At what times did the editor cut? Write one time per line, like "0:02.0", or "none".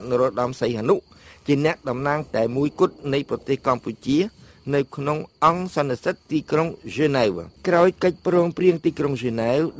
none

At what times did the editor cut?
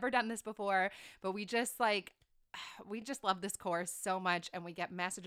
none

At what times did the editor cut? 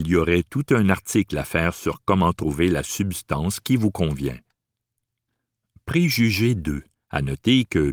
0:06.9

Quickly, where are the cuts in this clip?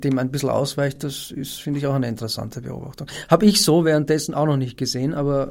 none

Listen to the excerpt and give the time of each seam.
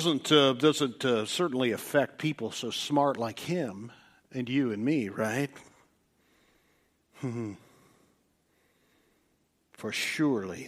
none

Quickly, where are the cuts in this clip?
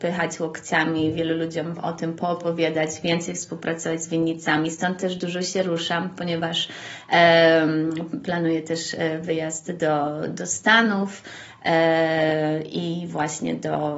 none

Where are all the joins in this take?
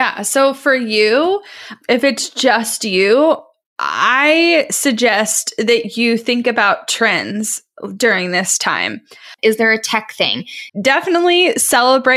0:09.4
0:10.7

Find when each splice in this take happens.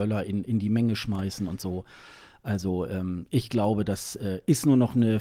none

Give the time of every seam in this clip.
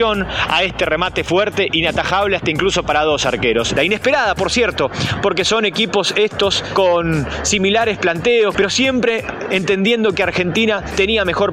0:03.8
0:08.5

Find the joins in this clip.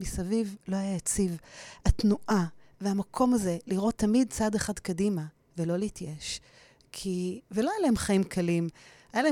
none

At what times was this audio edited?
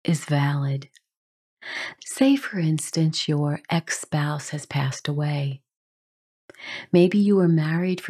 0:02.0

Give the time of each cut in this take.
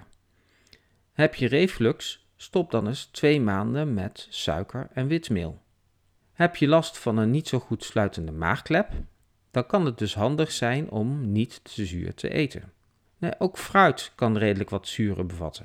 0:06.2
0:13.1

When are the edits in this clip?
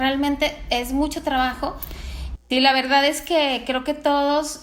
0:02.4

